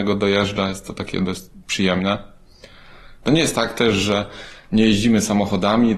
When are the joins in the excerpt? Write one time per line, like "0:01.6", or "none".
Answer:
0:03.2